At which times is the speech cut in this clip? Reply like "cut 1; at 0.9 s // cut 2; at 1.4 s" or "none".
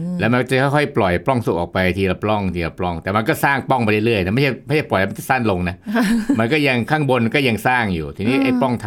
none

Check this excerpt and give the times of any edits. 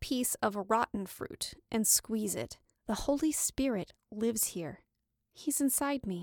cut 1; at 2.7 s

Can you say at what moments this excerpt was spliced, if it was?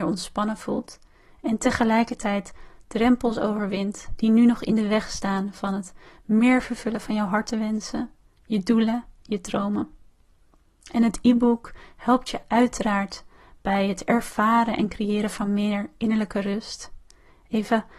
none

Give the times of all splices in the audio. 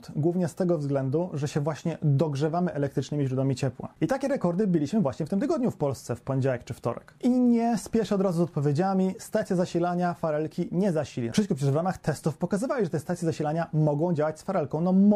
none

